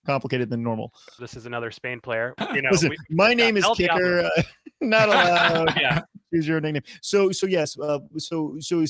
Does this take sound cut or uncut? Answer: cut